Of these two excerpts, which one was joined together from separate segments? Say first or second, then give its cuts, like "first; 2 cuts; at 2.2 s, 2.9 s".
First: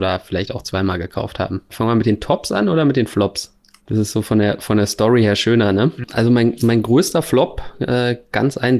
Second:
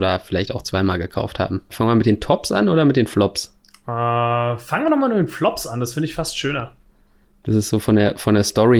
first; 1 cut; at 3.8 s